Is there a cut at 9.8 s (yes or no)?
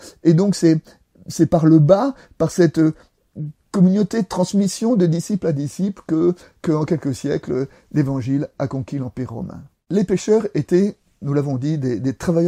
no